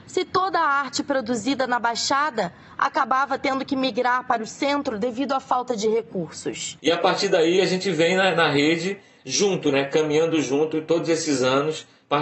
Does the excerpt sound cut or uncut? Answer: cut